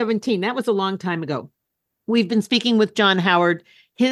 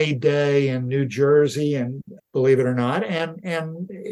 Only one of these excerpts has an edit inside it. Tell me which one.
second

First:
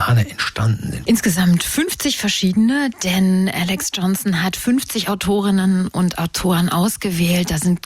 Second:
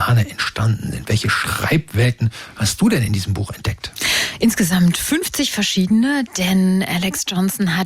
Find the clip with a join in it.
first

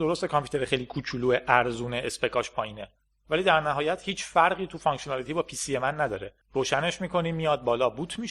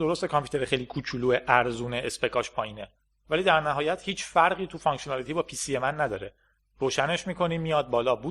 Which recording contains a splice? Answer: first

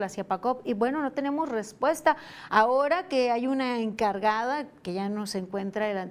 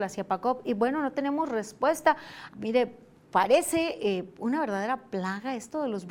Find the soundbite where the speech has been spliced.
second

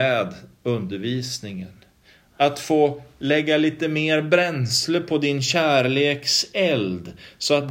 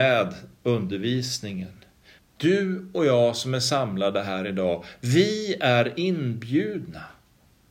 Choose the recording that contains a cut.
second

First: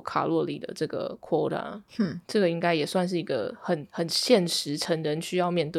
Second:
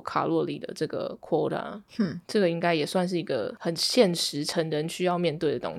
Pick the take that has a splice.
second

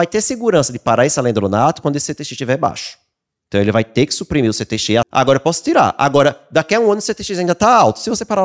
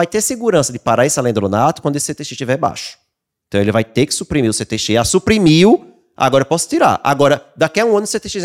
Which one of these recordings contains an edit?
first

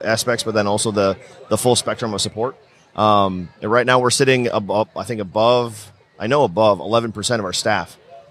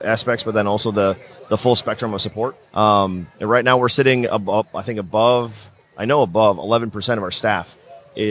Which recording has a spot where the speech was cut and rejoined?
second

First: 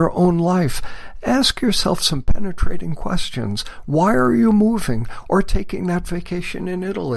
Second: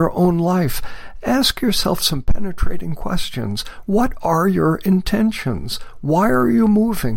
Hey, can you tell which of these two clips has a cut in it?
first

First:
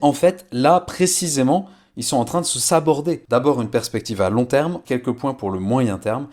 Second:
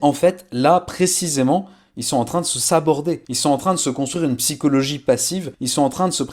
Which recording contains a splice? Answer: first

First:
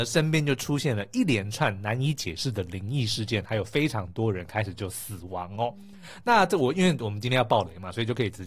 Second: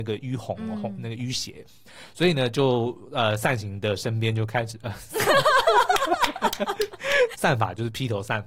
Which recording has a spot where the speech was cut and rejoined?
second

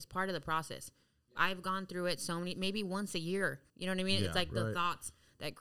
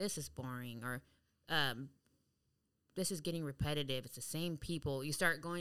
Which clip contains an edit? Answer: first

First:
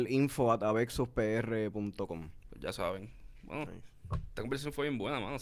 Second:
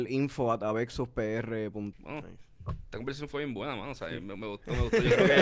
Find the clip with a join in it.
second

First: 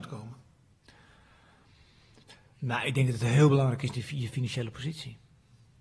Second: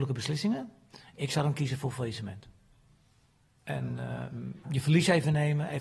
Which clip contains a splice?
second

